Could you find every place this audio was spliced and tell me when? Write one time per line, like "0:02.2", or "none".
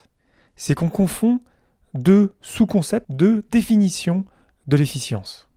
0:03.0